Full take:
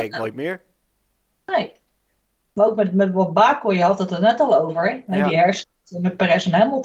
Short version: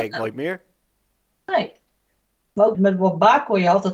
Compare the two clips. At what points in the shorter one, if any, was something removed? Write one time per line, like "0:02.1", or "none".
0:02.7